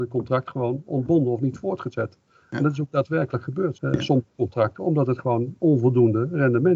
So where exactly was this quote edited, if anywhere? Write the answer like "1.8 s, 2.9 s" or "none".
3.7 s